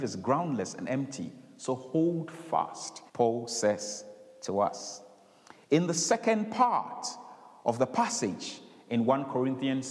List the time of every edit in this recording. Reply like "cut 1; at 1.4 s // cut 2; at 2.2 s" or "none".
cut 1; at 3.1 s